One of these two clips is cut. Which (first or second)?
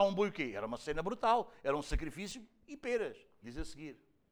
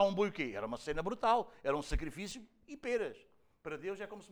first